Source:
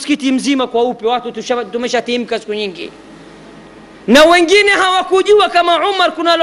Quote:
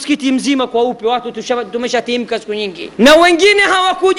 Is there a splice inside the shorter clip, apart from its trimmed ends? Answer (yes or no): yes